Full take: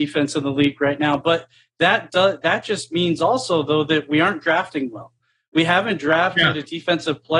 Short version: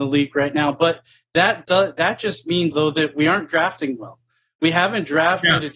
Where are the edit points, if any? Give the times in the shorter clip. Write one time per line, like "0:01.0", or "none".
0:02.7